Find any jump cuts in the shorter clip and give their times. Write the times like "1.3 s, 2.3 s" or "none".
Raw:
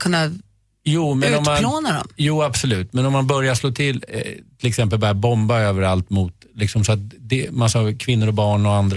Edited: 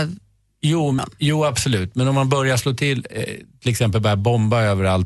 1.0 s